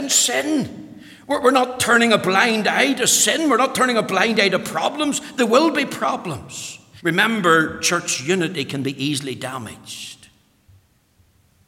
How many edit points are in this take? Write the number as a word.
one